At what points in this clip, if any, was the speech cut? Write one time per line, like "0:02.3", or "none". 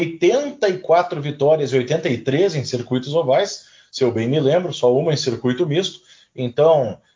none